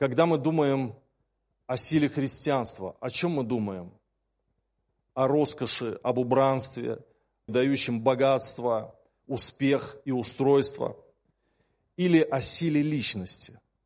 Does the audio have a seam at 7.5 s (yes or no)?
yes